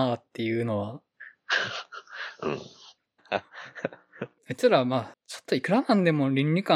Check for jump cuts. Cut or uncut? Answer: cut